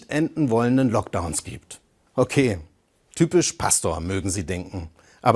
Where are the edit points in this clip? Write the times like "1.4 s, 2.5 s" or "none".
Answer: 2.1 s